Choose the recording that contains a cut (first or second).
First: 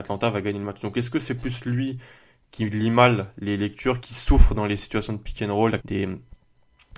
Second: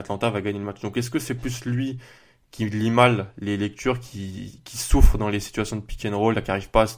first